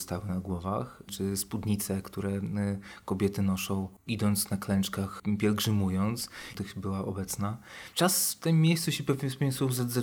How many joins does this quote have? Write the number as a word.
two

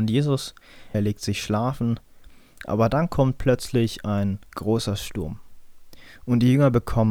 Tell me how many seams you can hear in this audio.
one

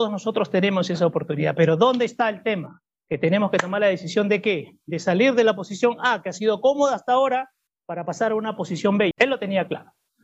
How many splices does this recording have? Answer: one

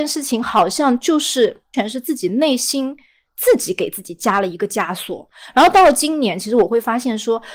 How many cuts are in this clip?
one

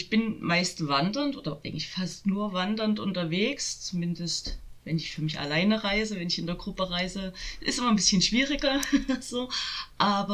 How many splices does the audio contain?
zero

